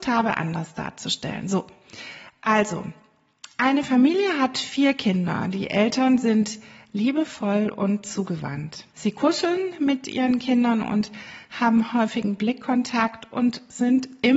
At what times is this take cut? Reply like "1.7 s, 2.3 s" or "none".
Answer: 8.9 s